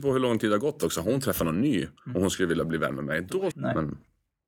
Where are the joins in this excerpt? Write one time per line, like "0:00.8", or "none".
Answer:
0:03.5